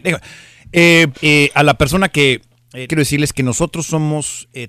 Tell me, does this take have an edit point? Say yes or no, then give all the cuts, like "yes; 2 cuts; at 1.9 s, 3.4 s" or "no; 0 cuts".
yes; 2 cuts; at 1.1 s, 2.9 s